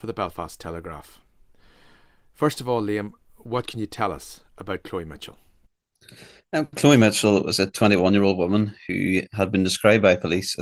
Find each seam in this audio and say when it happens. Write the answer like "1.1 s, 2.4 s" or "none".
none